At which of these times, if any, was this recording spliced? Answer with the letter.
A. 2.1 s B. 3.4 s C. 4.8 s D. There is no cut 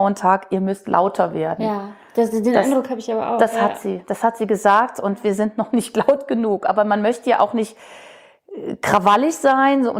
D